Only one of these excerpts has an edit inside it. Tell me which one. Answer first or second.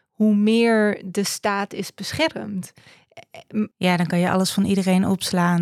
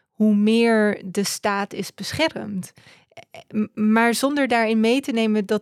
first